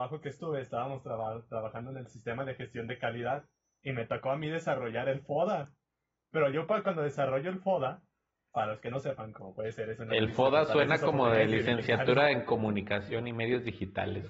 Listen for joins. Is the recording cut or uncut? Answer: uncut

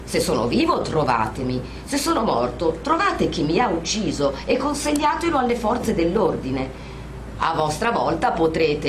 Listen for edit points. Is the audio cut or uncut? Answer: cut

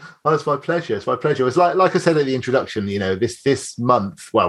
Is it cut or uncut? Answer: uncut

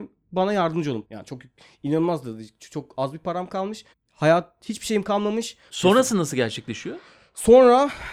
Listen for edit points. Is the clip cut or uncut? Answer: cut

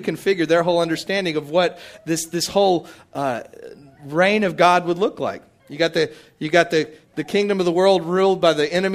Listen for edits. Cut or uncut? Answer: cut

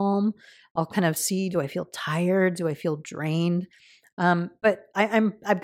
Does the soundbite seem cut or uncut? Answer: uncut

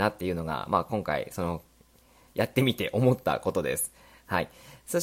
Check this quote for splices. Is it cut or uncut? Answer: uncut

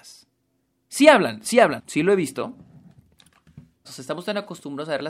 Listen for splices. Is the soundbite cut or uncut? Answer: cut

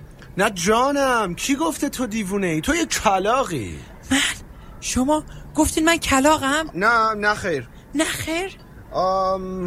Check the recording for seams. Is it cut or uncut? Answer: cut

